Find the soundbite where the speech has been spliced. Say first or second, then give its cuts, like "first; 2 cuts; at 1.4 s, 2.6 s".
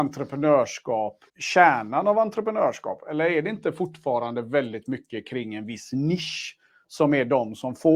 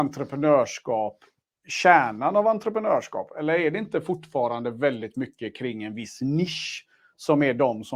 first; 1 cut; at 1.3 s